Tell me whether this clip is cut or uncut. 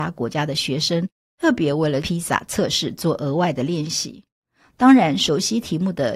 uncut